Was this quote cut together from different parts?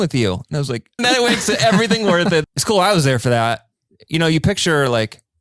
yes; 2 cuts; at 1.0 s, 2.4 s

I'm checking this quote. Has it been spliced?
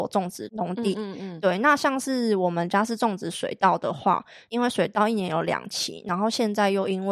no; 0 cuts

